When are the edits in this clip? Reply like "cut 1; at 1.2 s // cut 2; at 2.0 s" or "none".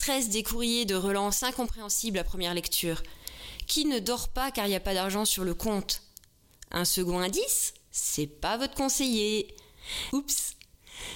cut 1; at 10.1 s